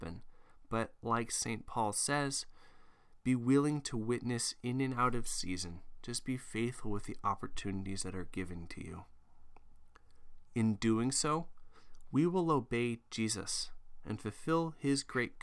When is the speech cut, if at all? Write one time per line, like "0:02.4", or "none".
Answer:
none